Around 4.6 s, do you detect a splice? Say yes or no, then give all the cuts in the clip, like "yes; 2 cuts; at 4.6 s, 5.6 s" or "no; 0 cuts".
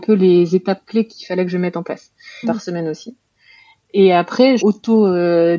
yes; 2 cuts; at 2.4 s, 4.6 s